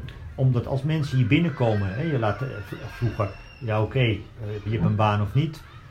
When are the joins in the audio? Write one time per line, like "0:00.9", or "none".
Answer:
0:04.7